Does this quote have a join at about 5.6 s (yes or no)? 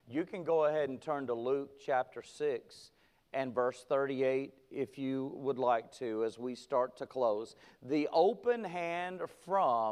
no